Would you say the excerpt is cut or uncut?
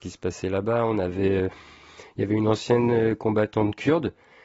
uncut